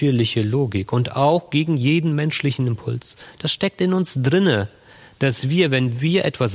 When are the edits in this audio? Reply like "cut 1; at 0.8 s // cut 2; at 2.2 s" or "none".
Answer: none